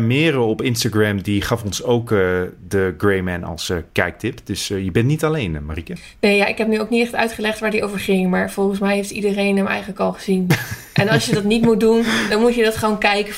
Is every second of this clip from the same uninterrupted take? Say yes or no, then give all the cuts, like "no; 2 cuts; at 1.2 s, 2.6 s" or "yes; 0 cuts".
yes; 0 cuts